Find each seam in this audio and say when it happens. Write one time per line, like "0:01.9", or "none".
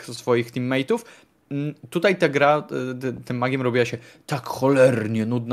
none